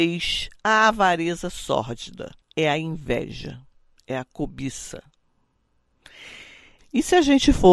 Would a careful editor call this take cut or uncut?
cut